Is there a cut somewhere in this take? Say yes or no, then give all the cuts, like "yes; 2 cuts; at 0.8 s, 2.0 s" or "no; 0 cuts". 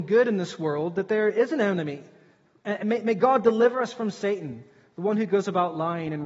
no; 0 cuts